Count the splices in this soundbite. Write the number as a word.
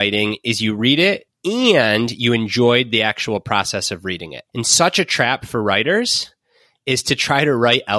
two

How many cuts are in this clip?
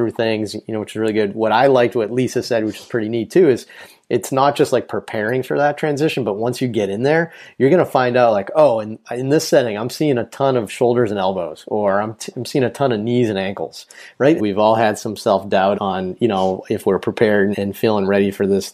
three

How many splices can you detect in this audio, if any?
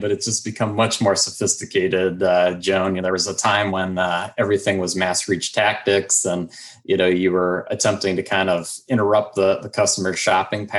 zero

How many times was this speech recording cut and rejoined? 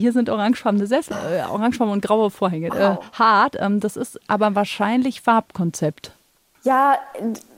two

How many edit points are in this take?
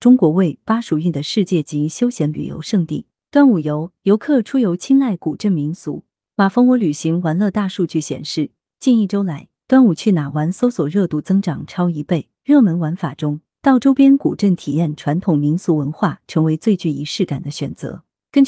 zero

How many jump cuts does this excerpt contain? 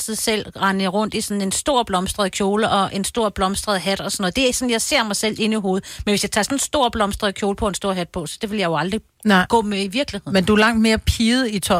zero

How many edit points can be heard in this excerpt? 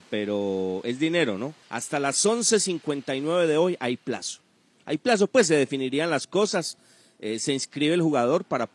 one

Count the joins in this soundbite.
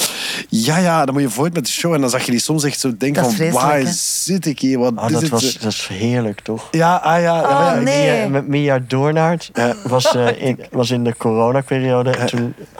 one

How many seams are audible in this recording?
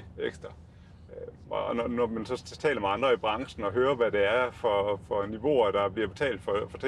zero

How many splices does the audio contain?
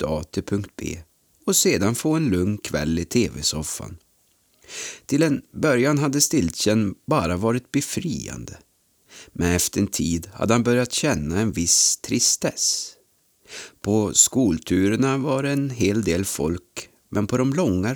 zero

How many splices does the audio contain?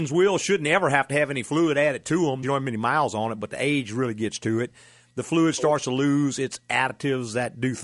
one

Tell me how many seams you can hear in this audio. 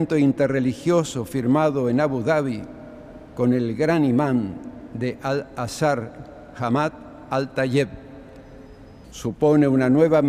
one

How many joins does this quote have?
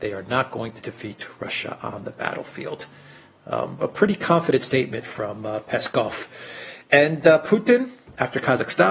zero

